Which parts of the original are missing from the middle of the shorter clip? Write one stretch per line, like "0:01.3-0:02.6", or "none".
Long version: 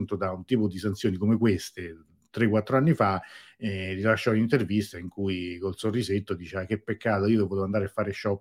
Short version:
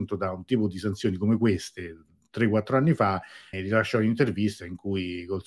0:03.5-0:03.9

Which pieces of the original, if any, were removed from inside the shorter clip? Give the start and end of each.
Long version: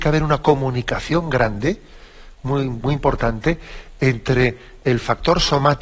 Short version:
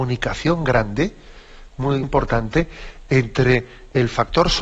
0:02.7-0:02.9

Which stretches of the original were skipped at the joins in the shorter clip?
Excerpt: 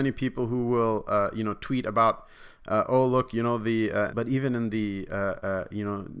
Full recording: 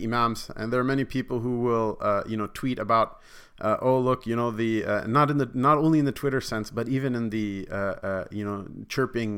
0:05.0-0:06.7

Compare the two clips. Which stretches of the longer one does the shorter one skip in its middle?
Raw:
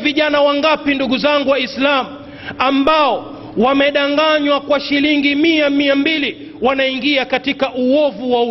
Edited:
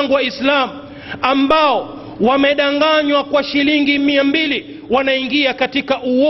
0:05.3-0:05.7

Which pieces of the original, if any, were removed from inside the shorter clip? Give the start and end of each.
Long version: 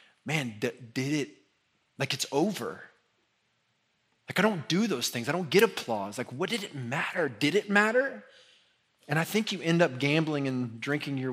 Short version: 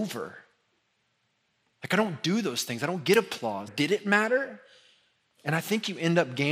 0:06.1-0:07.3

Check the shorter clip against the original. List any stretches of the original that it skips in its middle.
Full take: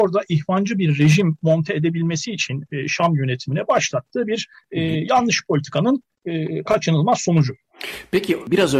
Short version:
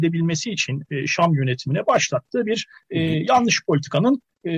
none

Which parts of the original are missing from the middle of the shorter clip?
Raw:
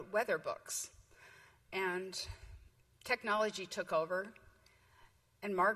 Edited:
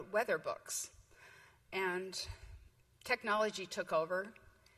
none

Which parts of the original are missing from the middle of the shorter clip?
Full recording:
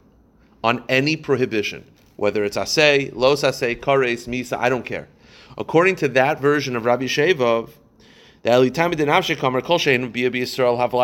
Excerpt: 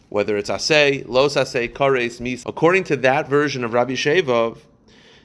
0:04.5-0:05.6

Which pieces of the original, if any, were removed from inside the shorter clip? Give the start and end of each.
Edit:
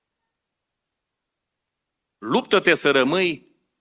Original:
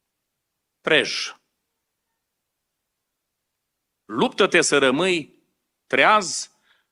none

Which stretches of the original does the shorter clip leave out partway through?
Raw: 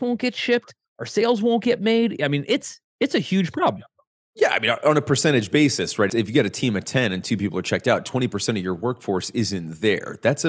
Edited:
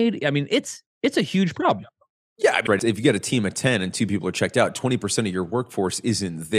0:04.6-0:06.0

